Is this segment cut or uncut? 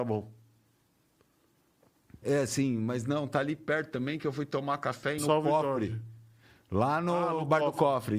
cut